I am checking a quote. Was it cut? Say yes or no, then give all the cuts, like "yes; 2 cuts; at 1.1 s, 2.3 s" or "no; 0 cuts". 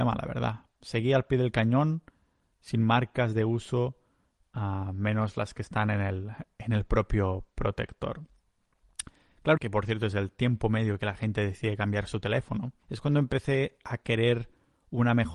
yes; 2 cuts; at 9.6 s, 12.8 s